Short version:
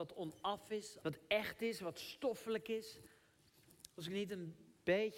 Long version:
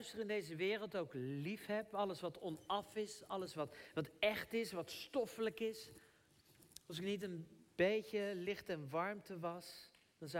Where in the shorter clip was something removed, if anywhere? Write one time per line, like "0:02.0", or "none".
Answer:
0:01.0